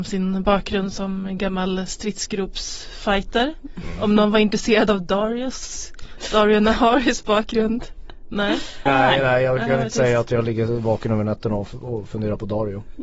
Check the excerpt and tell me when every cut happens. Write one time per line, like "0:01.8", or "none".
0:08.9